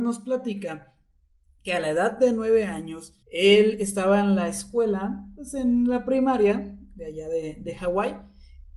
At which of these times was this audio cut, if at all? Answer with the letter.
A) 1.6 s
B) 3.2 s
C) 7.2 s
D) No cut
B